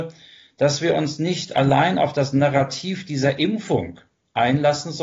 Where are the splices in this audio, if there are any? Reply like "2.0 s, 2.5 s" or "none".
none